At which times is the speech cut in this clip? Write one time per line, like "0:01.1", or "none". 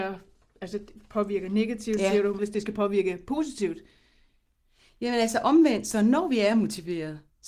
0:02.4